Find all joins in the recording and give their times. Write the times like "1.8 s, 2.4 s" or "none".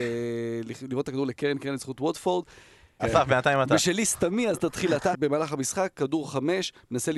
3.0 s, 5.1 s